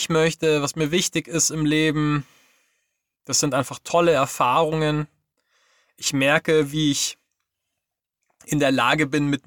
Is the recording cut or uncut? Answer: uncut